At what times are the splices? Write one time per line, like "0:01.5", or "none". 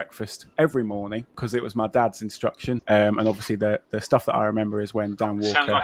0:02.8